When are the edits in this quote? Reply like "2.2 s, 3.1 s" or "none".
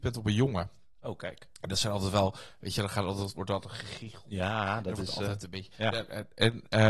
none